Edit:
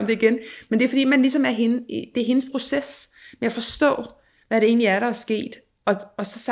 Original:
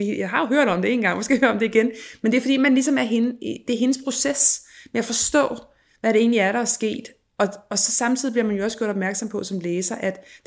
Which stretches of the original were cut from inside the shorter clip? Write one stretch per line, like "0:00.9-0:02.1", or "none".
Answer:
none